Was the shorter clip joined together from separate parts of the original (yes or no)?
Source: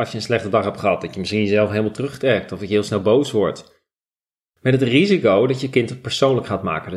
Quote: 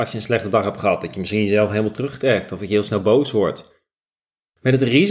no